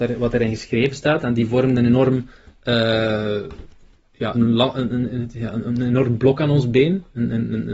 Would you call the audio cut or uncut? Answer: cut